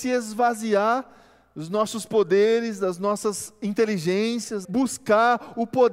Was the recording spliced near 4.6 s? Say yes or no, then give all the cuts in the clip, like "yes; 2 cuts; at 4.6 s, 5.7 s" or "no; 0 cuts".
yes; 1 cut; at 4.6 s